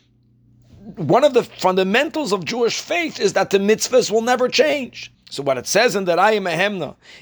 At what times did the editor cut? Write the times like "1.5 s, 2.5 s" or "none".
5.1 s